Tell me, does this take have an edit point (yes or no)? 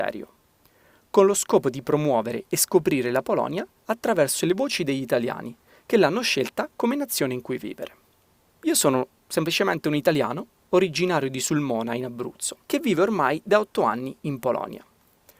yes